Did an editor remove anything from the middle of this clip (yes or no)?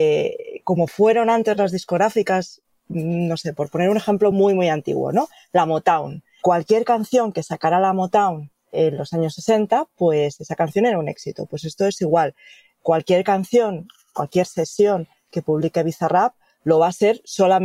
no